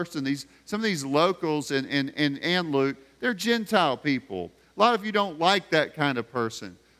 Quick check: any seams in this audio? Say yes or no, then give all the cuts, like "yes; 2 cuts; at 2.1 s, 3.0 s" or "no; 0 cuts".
no; 0 cuts